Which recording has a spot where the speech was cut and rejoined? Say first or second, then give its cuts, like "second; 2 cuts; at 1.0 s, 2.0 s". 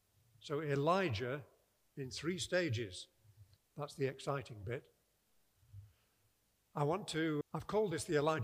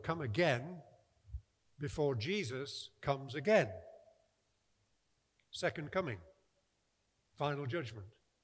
first; 2 cuts; at 3.6 s, 7.4 s